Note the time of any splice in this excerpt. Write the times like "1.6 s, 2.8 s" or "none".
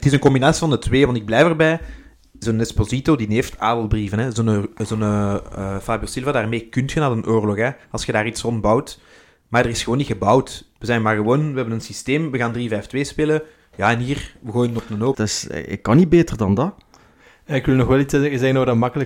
15.1 s